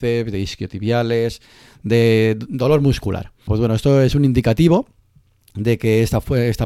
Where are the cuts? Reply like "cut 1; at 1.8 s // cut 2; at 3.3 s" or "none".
cut 1; at 3.5 s